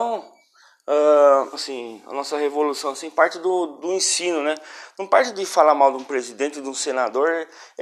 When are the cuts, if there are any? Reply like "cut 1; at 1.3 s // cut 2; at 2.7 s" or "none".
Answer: cut 1; at 1.5 s